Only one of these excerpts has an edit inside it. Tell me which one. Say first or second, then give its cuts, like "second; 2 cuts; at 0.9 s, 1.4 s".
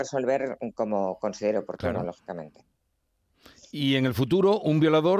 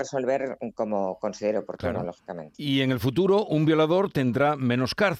second; 1 cut; at 2.5 s